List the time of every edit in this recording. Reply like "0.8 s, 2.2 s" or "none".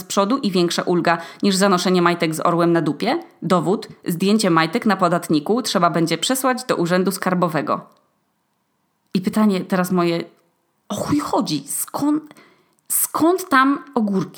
none